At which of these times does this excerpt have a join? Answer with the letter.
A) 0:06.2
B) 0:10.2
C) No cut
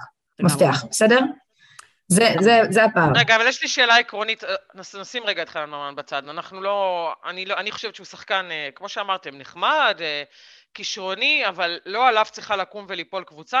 C